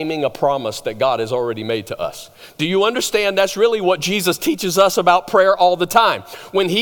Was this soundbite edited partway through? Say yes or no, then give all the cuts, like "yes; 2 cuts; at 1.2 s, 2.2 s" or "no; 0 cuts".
no; 0 cuts